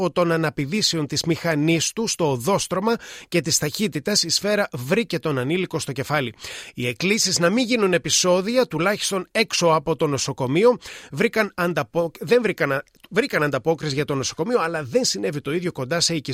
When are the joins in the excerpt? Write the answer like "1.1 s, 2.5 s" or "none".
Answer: none